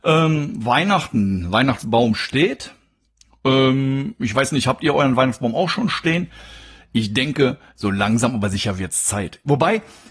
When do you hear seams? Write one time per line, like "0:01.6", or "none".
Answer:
none